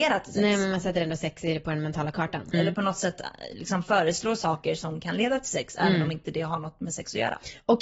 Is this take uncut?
no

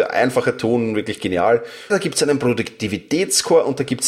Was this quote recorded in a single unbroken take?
no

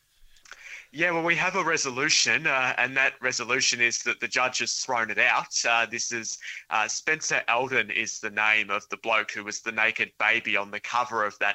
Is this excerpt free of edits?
yes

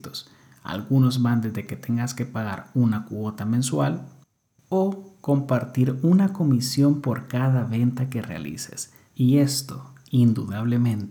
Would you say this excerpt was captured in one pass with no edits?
no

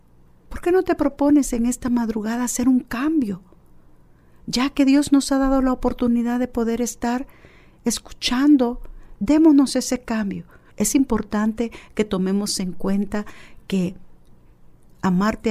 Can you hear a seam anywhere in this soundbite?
yes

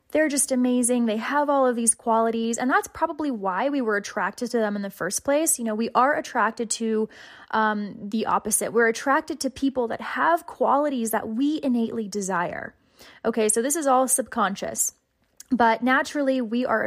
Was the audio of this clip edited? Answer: no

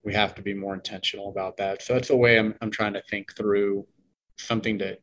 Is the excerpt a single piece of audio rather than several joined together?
yes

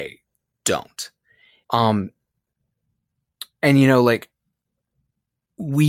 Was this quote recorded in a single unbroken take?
no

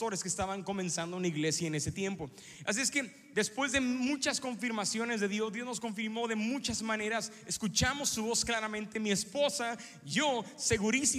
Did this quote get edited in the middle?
no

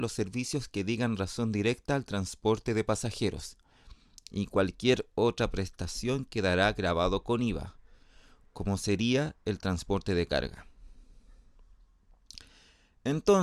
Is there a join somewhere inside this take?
no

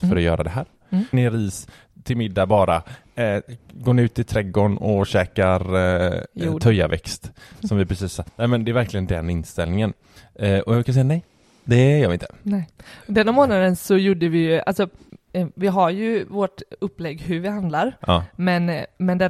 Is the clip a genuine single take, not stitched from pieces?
no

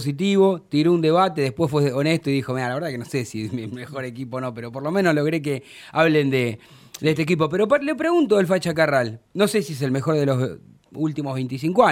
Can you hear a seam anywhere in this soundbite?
yes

